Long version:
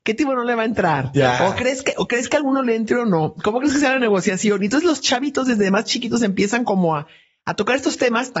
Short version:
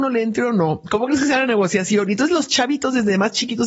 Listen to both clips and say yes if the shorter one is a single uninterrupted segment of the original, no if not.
yes